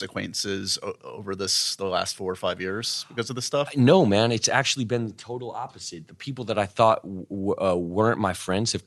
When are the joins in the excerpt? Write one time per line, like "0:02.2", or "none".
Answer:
none